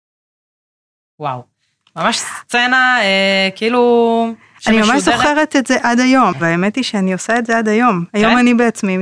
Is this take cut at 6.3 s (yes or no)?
yes